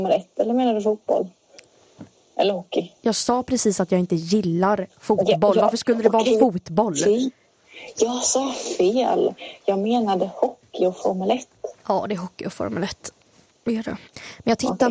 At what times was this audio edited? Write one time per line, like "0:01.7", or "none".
none